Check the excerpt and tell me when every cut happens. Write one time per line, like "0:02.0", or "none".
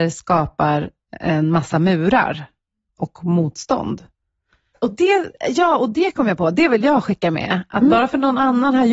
0:04.7